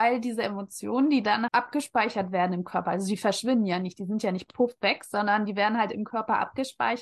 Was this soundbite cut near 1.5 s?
yes; 1 cut; at 1.5 s

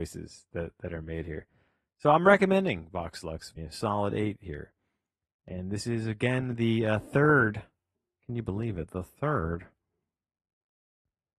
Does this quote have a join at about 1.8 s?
no; 1 cut; at 3.6 s

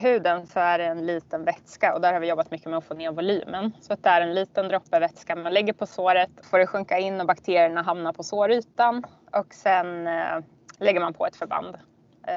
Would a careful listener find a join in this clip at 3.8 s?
no; 1 cut; at 6.4 s

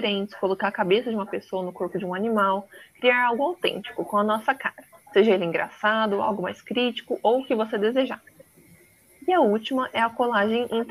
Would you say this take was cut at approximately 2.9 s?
no; 0 cuts

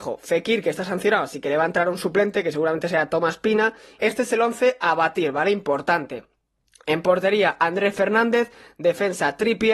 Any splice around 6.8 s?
no; 1 cut; at 4.0 s

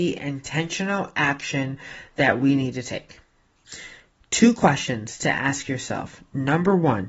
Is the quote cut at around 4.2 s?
no; 0 cuts

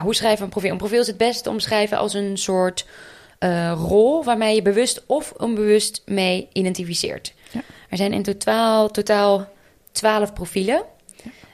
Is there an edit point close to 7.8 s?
no; 0 cuts

